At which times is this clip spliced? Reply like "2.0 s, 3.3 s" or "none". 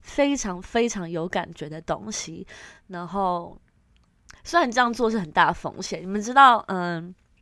none